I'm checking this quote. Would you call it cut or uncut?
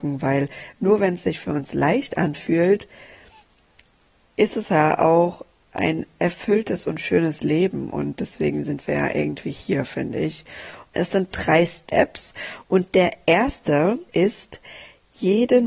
cut